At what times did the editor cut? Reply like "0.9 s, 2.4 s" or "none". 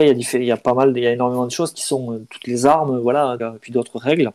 3.4 s